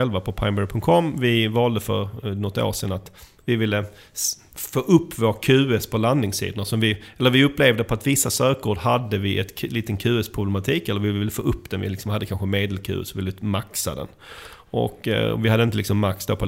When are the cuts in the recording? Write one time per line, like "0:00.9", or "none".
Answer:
none

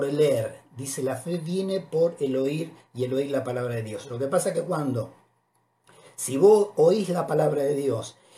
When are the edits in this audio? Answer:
none

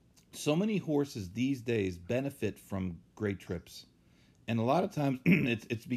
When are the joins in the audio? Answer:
none

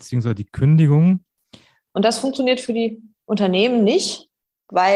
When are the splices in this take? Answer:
0:01.9
0:03.2

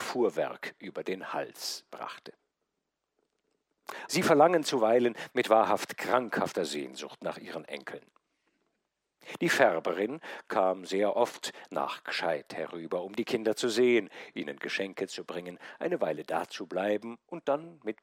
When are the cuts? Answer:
0:04.1

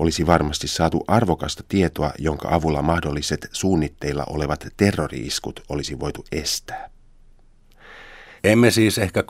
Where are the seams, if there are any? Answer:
0:08.4

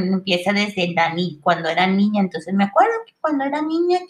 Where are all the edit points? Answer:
none

